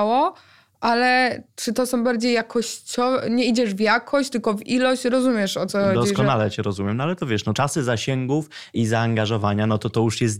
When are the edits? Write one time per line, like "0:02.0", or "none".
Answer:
none